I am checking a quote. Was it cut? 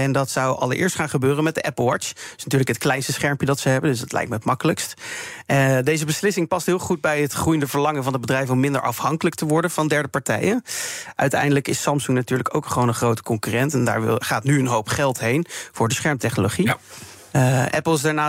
no; 0 cuts

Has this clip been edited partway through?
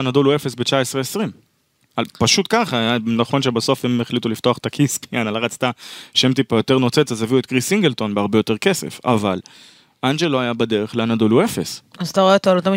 no; 0 cuts

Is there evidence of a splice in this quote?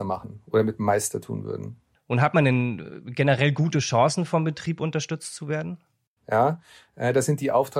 yes; 1 cut; at 6.2 s

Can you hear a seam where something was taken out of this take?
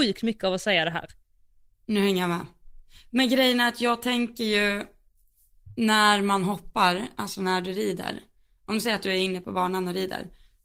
yes; 1 cut; at 1.7 s

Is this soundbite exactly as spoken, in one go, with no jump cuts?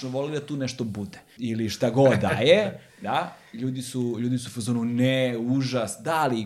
no; 1 cut; at 1.4 s

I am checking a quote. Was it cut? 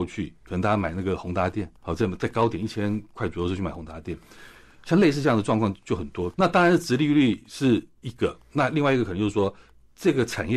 yes; 2 cuts; at 1.8 s, 6.3 s

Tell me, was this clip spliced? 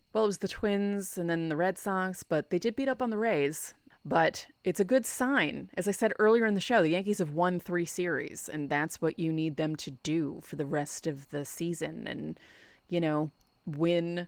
yes; 1 cut; at 3.9 s

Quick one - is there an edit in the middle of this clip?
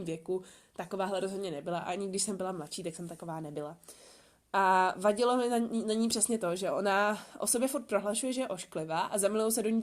no; 0 cuts

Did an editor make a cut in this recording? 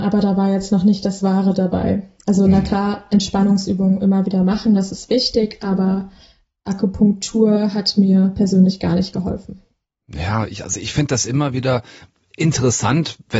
no; 0 cuts

